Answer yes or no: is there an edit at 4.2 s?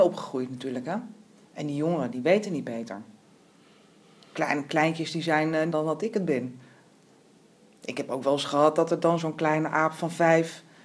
no